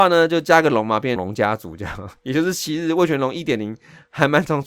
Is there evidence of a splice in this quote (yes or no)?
yes